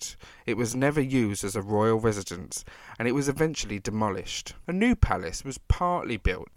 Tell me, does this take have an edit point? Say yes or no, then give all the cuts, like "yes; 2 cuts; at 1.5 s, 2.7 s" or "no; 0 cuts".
no; 0 cuts